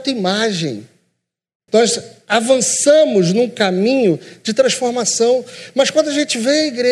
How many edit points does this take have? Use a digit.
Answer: 1